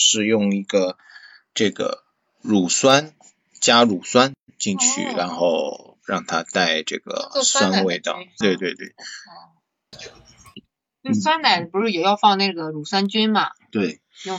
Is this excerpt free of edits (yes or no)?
no